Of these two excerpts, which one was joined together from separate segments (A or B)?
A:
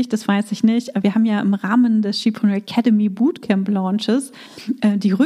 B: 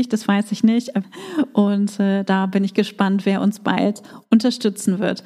B